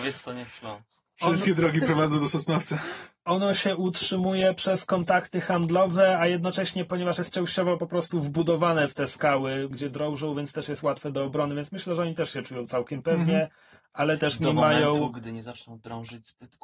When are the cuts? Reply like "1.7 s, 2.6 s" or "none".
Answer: 9.7 s